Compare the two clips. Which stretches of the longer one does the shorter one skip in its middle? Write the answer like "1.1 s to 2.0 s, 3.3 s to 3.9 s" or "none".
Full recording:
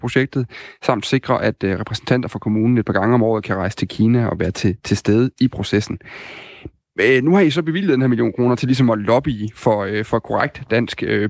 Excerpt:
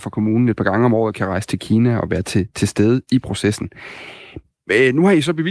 none